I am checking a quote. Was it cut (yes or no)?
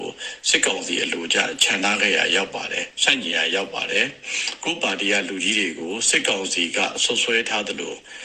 no